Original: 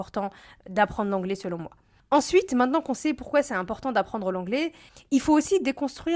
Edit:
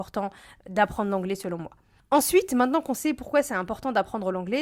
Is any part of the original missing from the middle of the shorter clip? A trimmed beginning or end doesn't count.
no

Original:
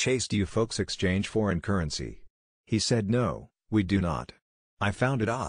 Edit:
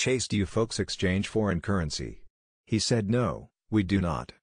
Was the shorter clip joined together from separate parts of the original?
no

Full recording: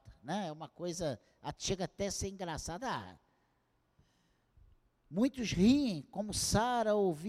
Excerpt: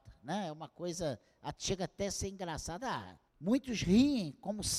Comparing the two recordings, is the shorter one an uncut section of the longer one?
no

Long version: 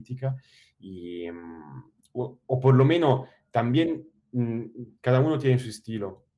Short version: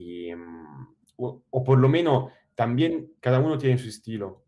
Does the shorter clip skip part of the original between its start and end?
yes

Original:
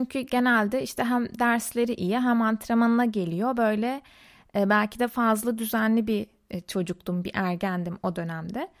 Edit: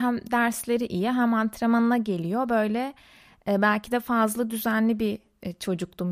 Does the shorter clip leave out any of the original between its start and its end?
no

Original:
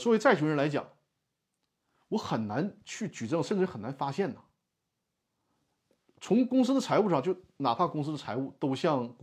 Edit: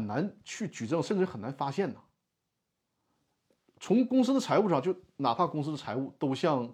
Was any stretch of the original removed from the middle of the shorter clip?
no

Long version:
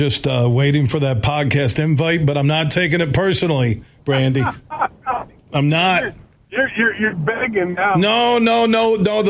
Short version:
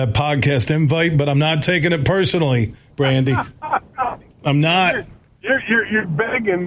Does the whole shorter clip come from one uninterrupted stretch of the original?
yes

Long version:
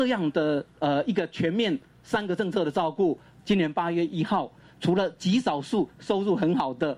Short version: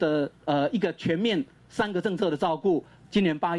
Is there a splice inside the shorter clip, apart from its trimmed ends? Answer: no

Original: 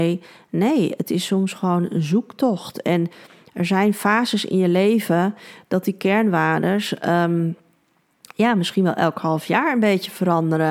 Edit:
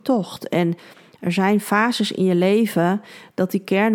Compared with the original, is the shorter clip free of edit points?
yes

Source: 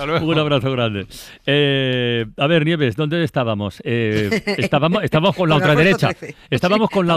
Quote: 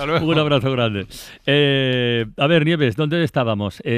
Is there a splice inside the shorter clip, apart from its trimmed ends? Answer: no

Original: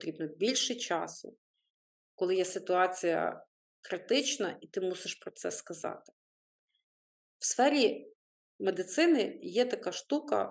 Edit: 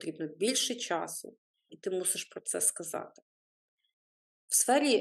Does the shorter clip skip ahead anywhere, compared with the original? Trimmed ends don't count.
yes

